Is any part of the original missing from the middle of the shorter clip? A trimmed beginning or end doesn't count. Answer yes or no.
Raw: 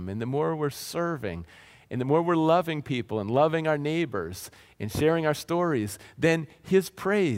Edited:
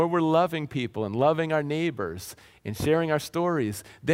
no